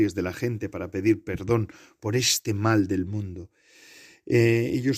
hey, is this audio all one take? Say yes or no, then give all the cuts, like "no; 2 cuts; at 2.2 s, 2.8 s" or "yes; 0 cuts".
yes; 0 cuts